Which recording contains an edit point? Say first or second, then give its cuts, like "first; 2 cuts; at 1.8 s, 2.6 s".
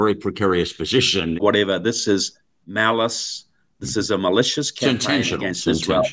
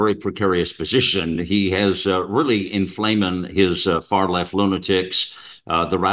first; 1 cut; at 1.4 s